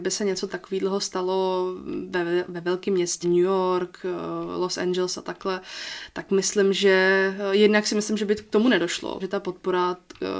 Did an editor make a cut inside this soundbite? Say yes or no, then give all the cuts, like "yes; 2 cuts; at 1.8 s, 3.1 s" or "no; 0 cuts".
yes; 2 cuts; at 3.2 s, 9.2 s